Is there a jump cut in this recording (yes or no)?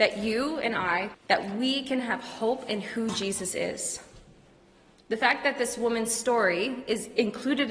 yes